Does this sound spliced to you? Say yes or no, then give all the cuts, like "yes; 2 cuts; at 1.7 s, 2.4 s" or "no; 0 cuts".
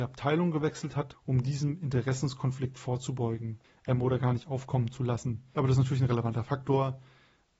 yes; 1 cut; at 1.1 s